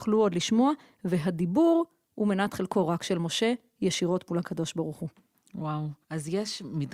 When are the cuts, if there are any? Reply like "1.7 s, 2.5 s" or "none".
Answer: 6.0 s